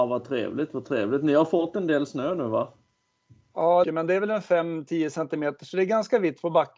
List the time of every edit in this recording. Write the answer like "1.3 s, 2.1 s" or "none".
3.8 s